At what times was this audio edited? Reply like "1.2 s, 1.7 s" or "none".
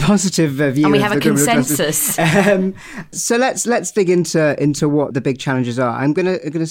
3.1 s, 5.1 s

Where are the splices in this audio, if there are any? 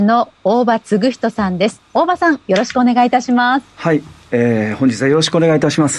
none

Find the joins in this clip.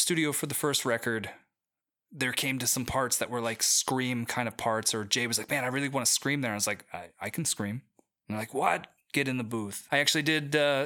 9.9 s

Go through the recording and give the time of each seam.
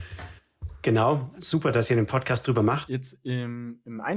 1.4 s, 2.9 s

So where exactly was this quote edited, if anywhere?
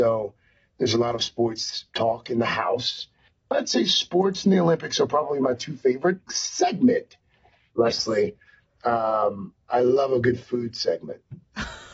6.3 s

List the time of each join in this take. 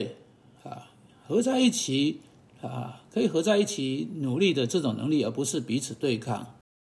none

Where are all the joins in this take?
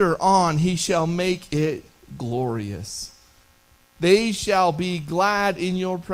4.0 s

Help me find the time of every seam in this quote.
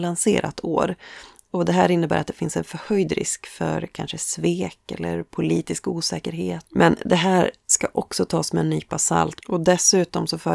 6.7 s, 9.4 s

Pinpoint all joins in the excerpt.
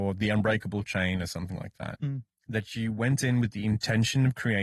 2.0 s

